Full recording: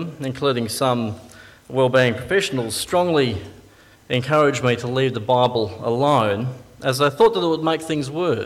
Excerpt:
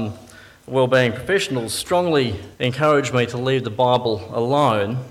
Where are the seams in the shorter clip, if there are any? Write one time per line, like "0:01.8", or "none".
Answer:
0:02.5